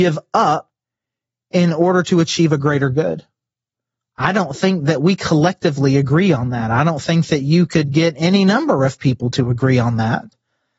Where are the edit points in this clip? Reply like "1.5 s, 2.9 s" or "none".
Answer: none